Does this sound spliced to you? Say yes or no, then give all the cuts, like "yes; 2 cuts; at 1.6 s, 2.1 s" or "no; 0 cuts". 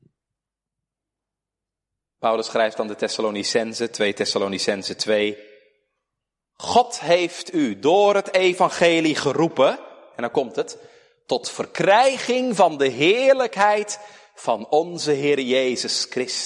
no; 0 cuts